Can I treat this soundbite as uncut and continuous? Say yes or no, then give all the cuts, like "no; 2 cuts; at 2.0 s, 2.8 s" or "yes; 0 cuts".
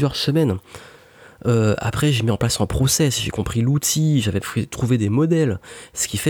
yes; 0 cuts